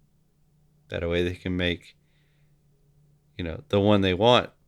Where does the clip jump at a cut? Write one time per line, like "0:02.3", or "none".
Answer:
none